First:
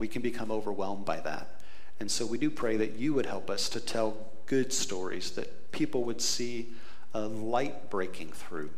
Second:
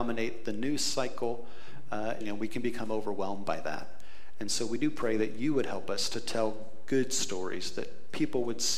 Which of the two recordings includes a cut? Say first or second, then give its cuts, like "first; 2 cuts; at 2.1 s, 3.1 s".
second; 1 cut; at 2.2 s